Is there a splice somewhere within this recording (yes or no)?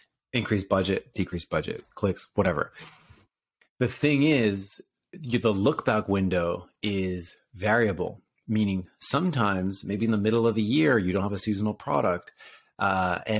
no